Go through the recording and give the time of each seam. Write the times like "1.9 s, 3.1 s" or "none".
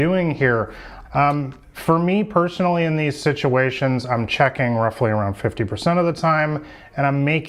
1.0 s

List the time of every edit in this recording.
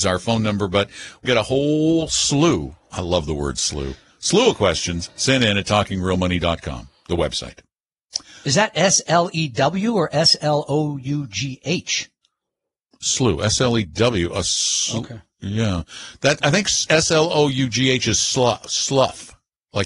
1.3 s

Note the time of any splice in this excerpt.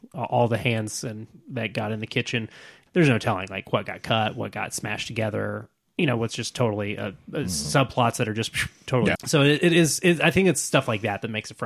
2.9 s, 9.1 s

